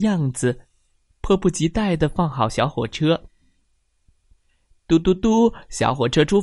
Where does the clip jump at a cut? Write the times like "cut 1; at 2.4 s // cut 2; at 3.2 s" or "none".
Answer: none